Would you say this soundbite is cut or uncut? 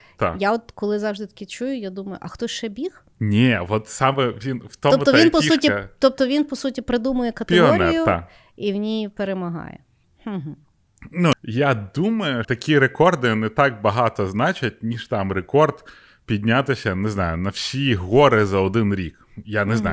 cut